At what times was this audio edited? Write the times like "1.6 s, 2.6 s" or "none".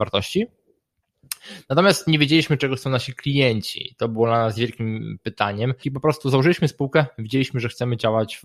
5.8 s